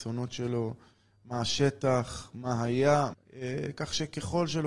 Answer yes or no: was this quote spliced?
yes